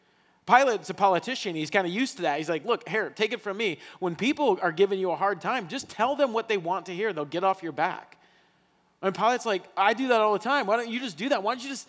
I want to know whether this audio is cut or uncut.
uncut